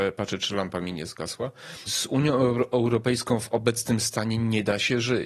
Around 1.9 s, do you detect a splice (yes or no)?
yes